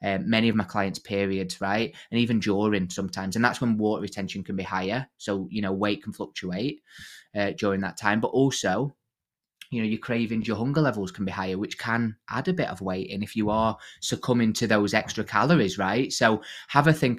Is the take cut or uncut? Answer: uncut